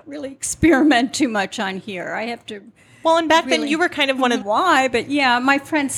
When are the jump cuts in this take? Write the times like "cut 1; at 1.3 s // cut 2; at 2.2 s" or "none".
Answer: cut 1; at 4.4 s

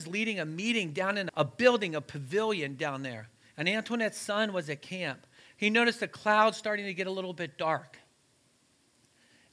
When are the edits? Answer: cut 1; at 1.3 s

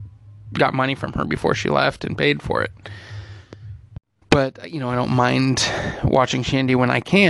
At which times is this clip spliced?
cut 1; at 4.2 s

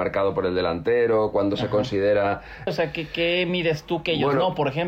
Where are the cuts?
cut 1; at 2.7 s

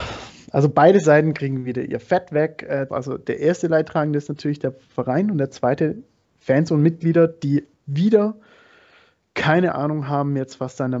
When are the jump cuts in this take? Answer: cut 1; at 2.9 s

